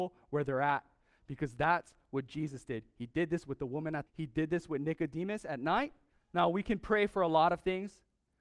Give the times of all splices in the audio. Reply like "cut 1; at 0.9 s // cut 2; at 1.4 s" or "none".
cut 1; at 4.1 s // cut 2; at 6.1 s